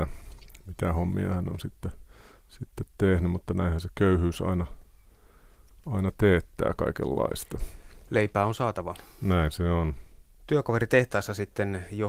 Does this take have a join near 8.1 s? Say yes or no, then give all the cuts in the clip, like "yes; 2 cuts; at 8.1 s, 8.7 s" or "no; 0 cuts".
no; 0 cuts